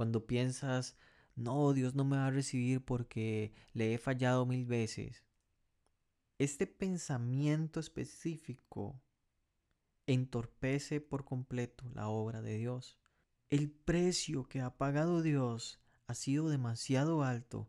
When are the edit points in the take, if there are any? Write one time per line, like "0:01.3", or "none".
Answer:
0:13.4